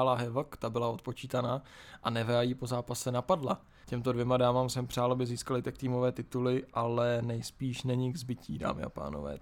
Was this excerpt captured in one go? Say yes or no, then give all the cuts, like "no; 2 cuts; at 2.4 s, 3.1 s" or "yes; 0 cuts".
no; 1 cut; at 3.8 s